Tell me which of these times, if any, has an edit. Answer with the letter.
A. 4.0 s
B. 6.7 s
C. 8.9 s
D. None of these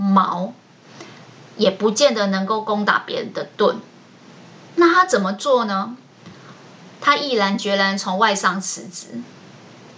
D